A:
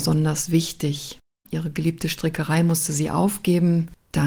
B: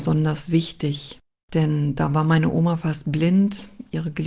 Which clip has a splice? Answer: A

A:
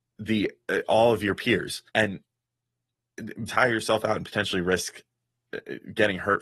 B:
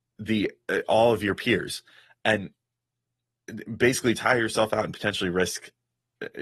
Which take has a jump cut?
A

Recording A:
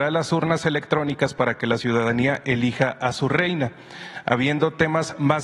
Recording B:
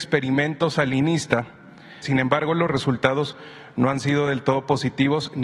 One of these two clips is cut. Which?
B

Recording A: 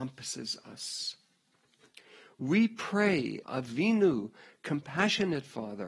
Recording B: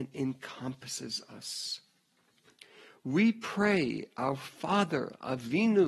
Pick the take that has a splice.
A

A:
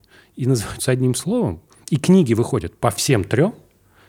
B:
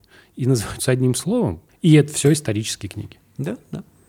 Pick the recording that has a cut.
B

